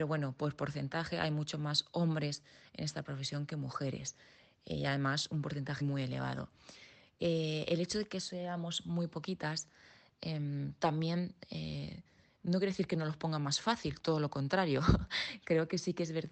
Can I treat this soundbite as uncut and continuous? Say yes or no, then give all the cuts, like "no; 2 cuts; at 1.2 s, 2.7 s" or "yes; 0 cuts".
no; 1 cut; at 5.8 s